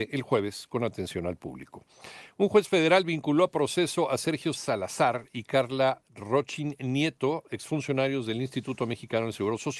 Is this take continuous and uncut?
no; 1 cut; at 4.5 s

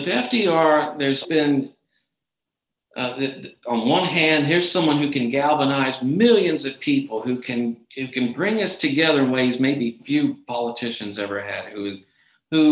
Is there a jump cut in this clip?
yes; 1 cut; at 1.2 s

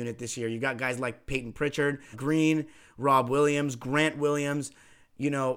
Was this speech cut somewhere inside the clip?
yes; 1 cut; at 2.1 s

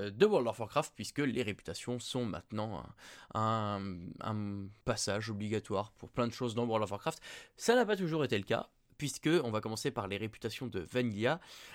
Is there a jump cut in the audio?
yes; 1 cut; at 4.8 s

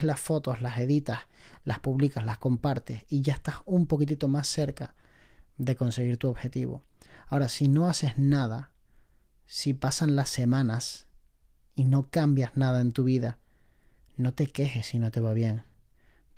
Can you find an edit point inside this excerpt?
no; 0 cuts

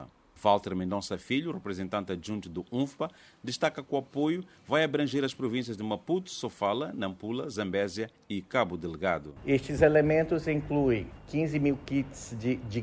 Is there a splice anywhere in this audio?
no; 0 cuts

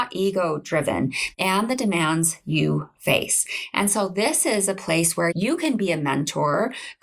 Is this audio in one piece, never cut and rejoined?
no; 2 cuts; at 1.3 s, 5.3 s

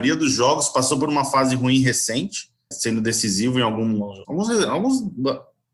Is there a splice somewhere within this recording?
yes; 2 cuts; at 2.7 s, 4.2 s

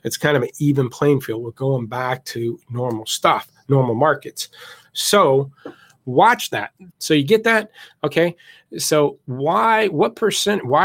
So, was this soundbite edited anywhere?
yes; 1 cut; at 6.9 s

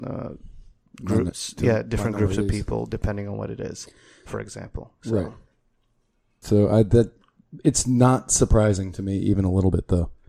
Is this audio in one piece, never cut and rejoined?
no; 1 cut; at 6.4 s

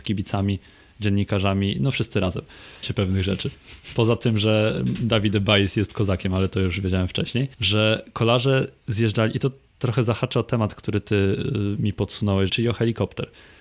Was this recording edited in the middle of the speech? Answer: yes; 3 cuts; at 2.8 s, 7.5 s, 12.5 s

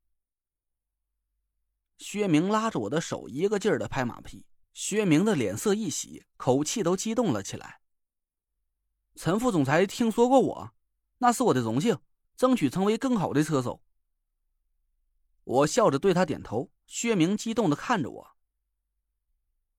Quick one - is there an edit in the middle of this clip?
yes; 2 cuts; at 4.6 s, 12.2 s

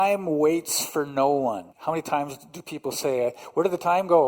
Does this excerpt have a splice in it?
yes; 1 cut; at 1.7 s

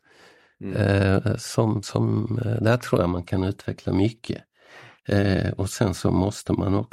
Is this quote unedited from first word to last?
yes; 0 cuts

